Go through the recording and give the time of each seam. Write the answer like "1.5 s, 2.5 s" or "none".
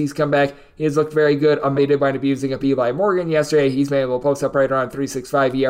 1.7 s